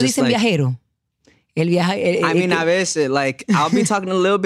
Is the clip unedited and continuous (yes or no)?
yes